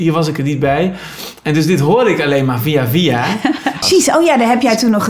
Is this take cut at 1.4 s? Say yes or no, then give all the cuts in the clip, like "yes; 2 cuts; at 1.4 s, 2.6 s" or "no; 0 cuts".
no; 1 cut; at 3.8 s